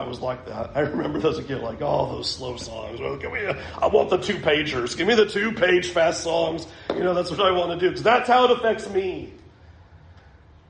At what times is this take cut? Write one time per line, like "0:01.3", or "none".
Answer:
none